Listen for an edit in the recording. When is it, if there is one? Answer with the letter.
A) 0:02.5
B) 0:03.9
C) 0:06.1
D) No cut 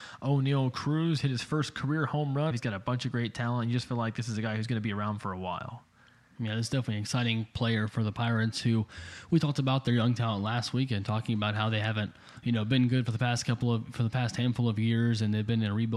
A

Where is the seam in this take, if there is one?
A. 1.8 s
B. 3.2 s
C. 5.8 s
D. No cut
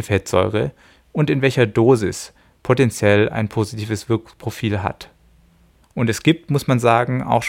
C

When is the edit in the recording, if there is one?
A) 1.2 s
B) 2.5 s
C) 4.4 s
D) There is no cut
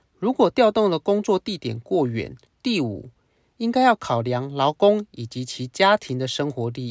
B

